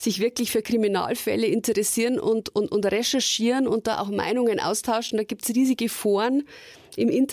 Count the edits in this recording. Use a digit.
0